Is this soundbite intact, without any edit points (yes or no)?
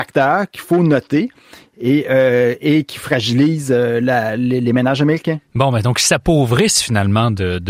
yes